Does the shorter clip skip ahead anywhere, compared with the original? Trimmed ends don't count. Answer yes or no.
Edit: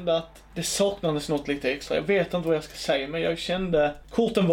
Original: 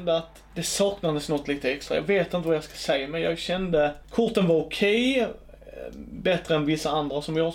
no